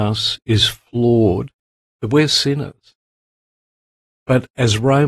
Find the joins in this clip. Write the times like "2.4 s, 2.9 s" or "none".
none